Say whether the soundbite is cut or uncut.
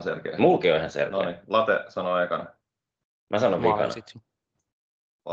uncut